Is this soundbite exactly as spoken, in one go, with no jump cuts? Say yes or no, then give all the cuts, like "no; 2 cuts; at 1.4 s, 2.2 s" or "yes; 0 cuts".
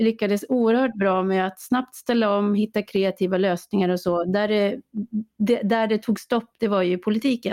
yes; 0 cuts